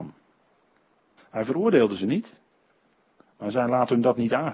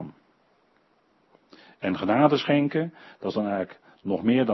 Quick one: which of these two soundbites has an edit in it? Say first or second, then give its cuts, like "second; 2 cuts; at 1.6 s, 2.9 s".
first; 1 cut; at 1.2 s